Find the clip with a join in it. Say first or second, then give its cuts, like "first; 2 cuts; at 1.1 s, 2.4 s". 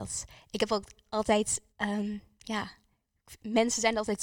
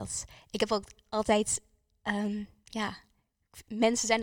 first; 1 cut; at 1.7 s